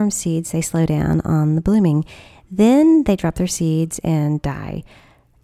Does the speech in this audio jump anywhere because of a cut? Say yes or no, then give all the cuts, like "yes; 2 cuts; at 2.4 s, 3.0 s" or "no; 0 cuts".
no; 0 cuts